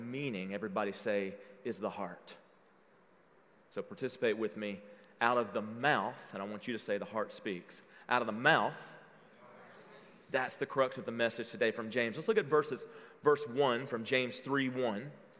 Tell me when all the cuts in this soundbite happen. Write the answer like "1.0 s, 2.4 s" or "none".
none